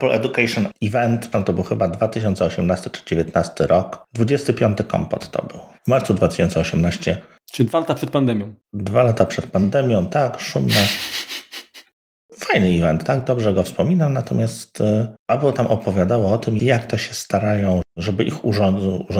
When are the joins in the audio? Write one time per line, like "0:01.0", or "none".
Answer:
0:15.2
0:16.6
0:17.8